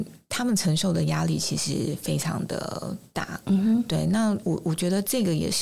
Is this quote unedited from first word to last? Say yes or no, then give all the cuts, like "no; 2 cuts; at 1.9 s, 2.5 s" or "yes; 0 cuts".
yes; 0 cuts